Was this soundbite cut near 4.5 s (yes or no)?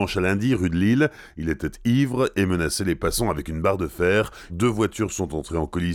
yes